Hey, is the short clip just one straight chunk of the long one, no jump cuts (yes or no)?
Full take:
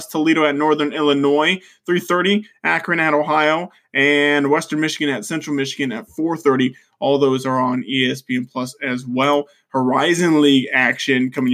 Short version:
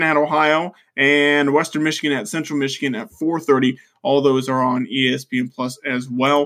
yes